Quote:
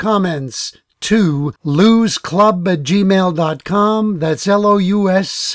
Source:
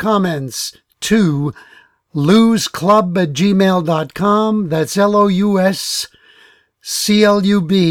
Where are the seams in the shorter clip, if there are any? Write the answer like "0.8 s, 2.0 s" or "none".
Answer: 1.6 s